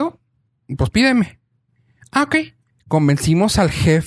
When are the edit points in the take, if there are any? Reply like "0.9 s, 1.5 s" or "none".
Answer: 2.7 s